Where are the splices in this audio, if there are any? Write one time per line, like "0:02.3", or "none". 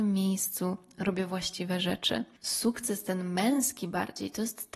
none

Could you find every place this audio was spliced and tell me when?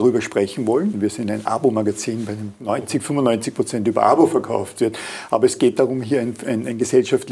0:00.9

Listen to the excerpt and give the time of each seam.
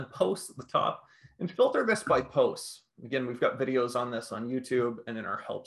none

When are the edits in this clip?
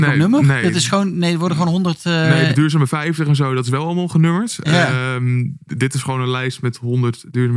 none

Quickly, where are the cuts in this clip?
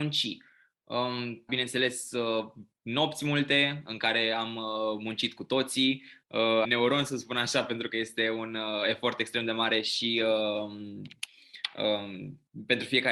0:01.5
0:06.6

